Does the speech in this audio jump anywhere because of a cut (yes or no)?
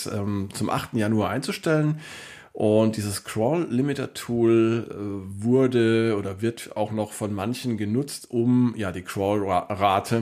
no